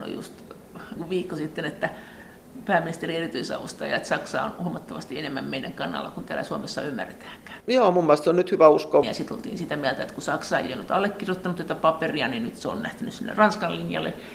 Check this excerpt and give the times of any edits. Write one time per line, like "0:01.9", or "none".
0:07.6
0:09.0